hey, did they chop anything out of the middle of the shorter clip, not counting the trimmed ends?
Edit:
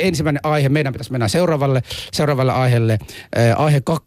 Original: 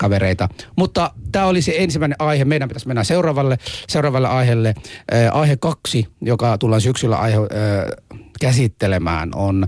no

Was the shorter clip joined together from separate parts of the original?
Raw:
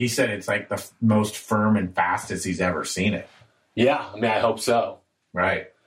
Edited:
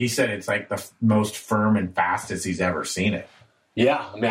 no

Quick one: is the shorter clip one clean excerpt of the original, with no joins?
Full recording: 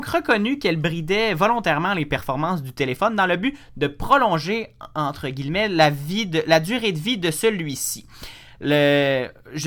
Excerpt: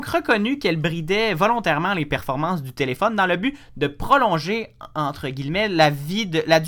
yes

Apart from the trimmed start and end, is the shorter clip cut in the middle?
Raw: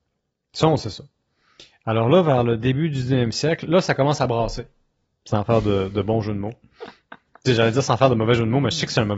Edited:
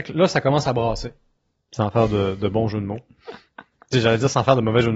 no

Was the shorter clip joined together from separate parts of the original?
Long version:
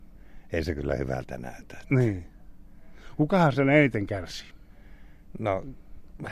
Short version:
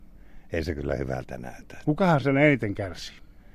yes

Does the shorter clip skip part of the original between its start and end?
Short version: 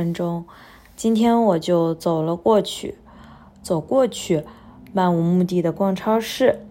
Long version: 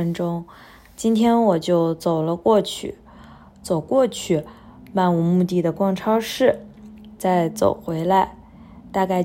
no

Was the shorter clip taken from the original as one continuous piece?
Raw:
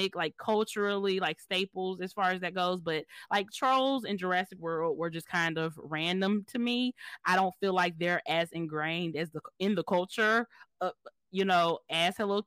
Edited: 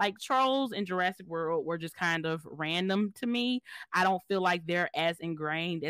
yes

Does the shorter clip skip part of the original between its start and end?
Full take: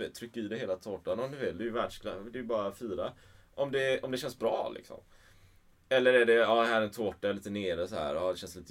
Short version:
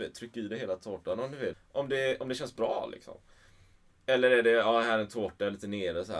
yes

